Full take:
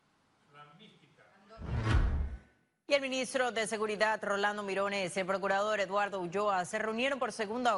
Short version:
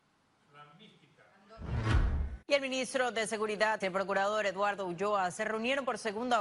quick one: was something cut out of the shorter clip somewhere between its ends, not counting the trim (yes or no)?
yes